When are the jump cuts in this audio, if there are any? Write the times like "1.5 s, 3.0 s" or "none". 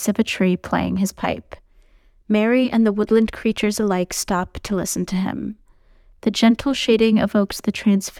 none